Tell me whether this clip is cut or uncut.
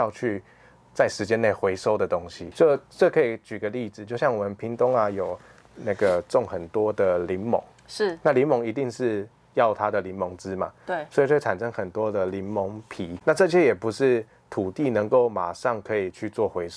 uncut